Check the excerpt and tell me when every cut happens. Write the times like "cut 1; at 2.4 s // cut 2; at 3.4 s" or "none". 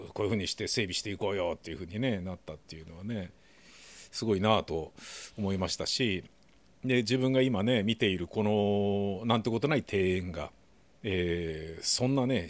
none